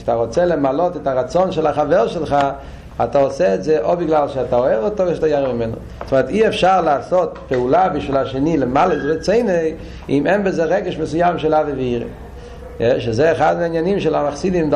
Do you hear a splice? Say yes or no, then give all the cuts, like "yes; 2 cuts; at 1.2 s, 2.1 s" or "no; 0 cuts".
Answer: no; 0 cuts